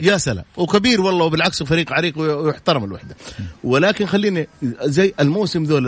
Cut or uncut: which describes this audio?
uncut